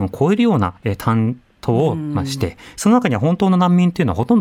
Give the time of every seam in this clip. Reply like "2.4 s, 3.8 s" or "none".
2.7 s